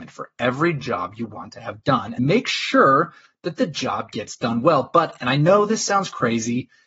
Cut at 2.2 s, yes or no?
yes